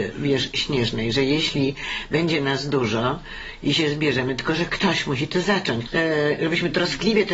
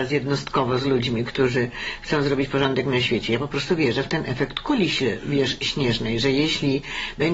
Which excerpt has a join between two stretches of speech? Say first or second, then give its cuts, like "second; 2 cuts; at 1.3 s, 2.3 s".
first; 1 cut; at 5.9 s